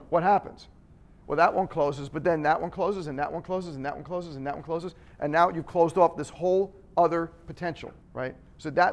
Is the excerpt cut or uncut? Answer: cut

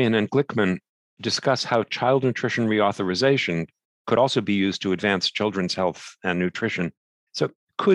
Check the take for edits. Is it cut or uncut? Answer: uncut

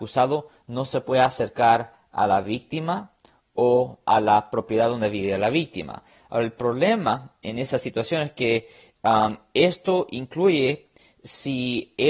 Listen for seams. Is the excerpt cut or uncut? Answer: uncut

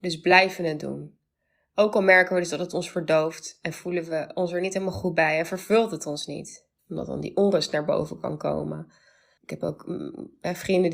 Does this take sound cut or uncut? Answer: cut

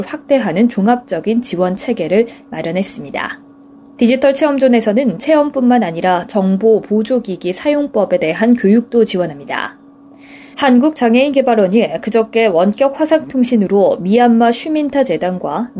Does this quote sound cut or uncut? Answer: cut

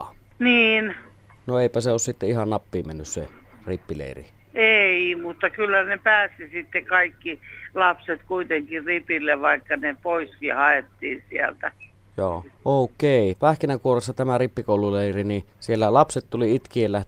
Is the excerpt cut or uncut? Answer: cut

